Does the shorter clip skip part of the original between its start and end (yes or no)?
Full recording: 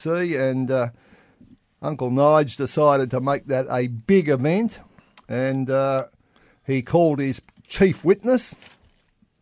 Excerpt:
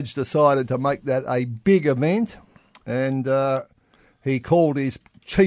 no